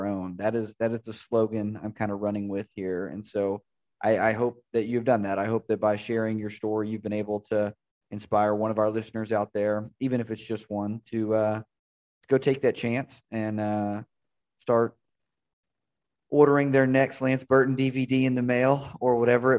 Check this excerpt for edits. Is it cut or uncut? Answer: uncut